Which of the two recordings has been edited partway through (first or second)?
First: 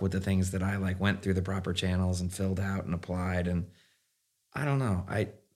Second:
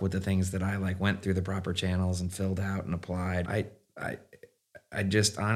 second